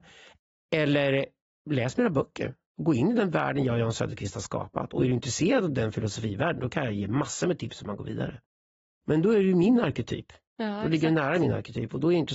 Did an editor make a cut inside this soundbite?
no; 0 cuts

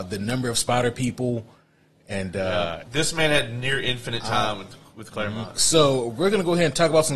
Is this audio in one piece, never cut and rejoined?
no; 2 cuts; at 2.9 s, 5.6 s

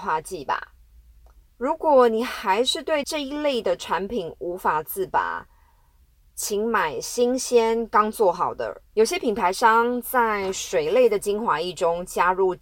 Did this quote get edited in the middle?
yes; 2 cuts; at 1.5 s, 8.9 s

